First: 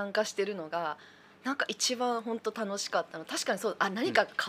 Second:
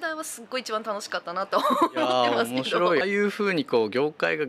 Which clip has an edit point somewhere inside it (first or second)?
second